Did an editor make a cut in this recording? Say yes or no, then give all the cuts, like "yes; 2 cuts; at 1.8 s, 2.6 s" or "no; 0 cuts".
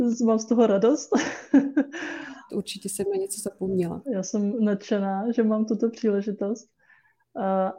yes; 2 cuts; at 2.5 s, 4.1 s